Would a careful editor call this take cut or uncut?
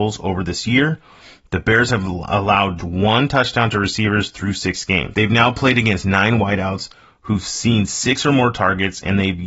cut